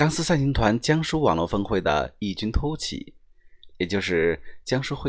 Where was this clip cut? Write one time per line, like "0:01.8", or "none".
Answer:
0:03.7